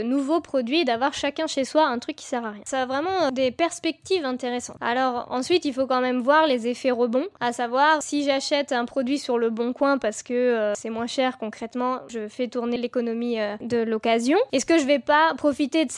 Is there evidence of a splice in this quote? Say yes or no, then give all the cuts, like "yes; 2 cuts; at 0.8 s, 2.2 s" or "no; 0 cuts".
yes; 1 cut; at 12.1 s